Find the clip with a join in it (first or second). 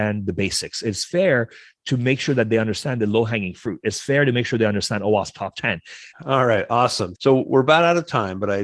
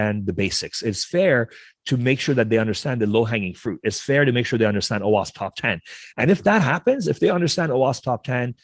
first